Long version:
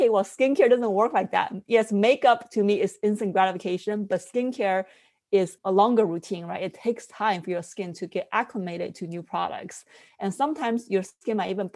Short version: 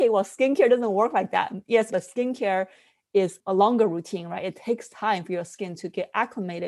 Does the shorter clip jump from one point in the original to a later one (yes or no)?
yes